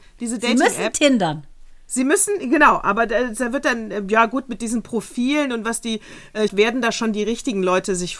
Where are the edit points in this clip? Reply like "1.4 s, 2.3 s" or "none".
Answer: 6.5 s